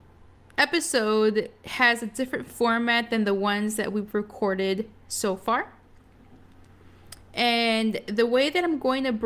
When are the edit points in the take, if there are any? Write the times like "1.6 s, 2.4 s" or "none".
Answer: none